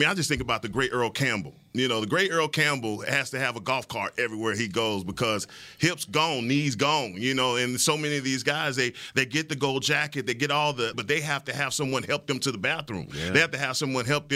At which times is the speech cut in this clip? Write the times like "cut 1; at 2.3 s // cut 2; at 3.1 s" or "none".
cut 1; at 10.9 s